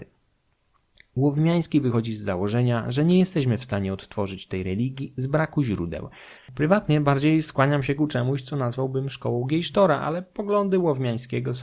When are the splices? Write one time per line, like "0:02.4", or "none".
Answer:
0:06.4